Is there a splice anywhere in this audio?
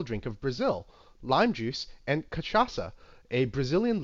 yes; 1 cut; at 1.2 s

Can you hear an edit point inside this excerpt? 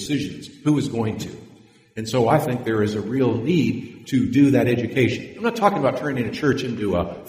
no; 0 cuts

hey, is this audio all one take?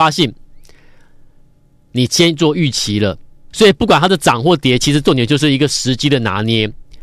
no; 1 cut; at 3.5 s

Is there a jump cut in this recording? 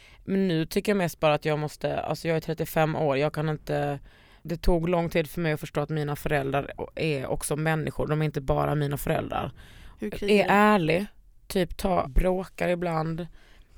yes; 2 cuts; at 10.0 s, 12.0 s

